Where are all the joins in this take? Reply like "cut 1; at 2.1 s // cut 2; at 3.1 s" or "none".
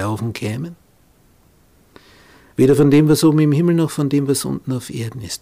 cut 1; at 2.5 s